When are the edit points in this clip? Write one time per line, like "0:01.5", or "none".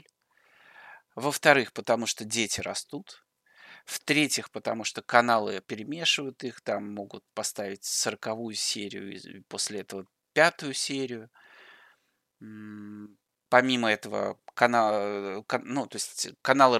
0:05.6